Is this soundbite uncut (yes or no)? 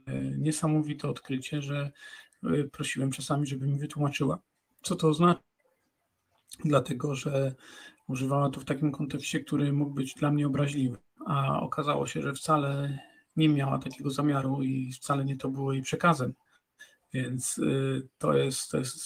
yes